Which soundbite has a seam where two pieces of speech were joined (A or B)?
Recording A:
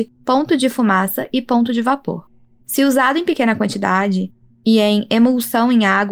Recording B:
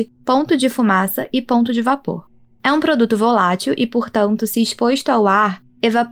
A